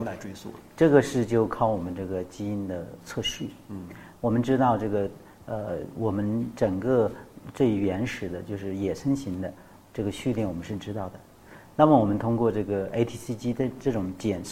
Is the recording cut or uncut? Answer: uncut